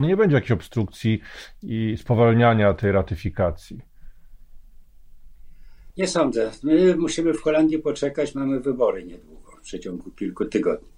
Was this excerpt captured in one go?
yes; 0 cuts

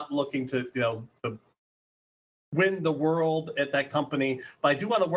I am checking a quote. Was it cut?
no; 0 cuts

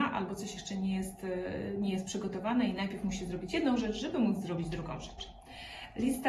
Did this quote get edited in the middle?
no; 0 cuts

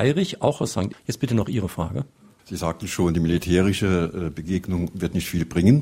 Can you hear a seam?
yes; 1 cut; at 0.9 s

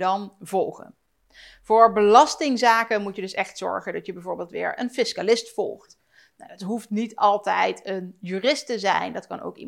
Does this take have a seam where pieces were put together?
no; 0 cuts

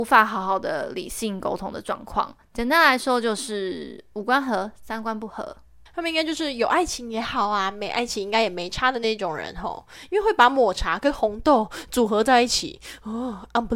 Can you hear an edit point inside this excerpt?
yes; 1 cut; at 5.9 s

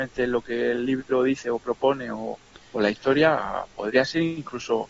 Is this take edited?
no; 0 cuts

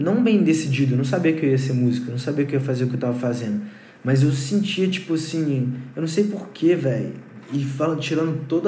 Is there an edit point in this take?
no; 0 cuts

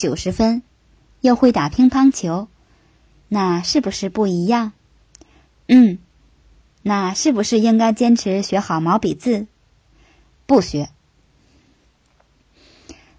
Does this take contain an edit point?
yes; 2 cuts; at 3.2 s, 6.6 s

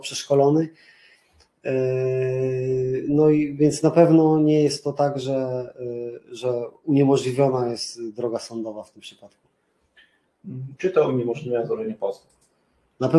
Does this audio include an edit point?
yes; 1 cut; at 10.8 s

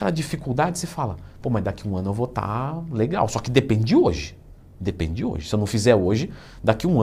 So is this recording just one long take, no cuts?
yes; 0 cuts

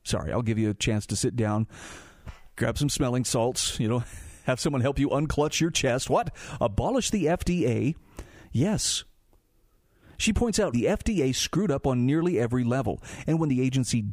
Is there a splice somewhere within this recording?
yes; 1 cut; at 10.7 s

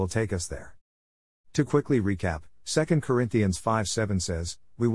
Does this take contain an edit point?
no; 0 cuts

